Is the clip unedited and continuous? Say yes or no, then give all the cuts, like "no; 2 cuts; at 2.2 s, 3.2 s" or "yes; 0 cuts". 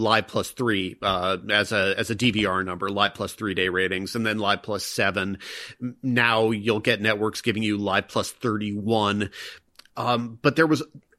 yes; 0 cuts